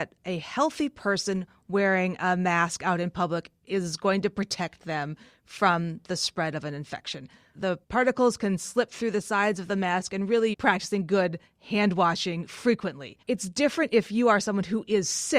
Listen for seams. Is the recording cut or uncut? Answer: cut